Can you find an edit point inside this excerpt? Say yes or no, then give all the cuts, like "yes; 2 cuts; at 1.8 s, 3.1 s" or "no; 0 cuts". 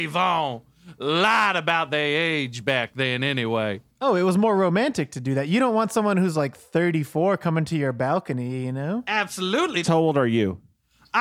yes; 2 cuts; at 3.9 s, 9.8 s